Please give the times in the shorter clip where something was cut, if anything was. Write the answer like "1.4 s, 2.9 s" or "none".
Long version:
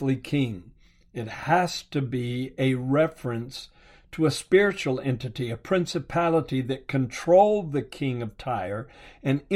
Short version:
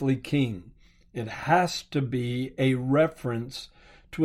none